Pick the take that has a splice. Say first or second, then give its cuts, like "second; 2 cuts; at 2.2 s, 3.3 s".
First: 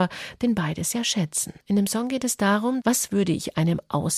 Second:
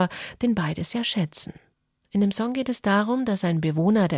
first; 2 cuts; at 1.6 s, 2.8 s